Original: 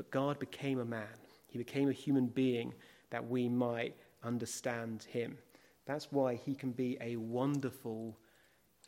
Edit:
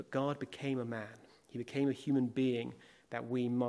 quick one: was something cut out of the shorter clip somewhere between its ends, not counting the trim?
no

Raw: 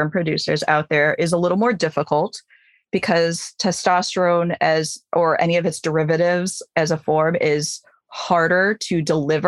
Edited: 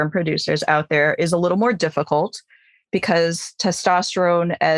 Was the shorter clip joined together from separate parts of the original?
no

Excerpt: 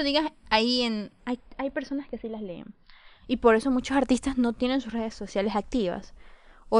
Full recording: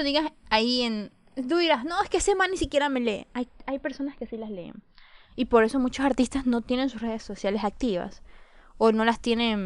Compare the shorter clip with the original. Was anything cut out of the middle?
yes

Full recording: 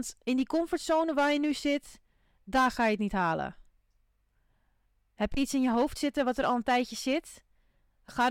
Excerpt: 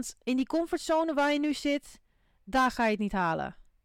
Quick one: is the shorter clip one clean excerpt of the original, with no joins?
yes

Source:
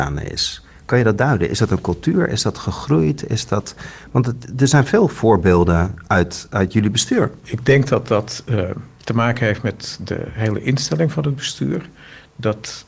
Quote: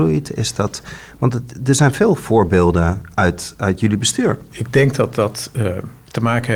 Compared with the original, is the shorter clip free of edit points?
yes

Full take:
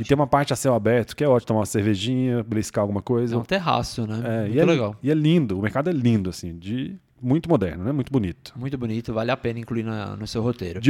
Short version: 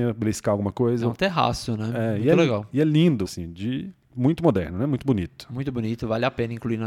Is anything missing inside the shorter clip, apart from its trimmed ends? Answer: yes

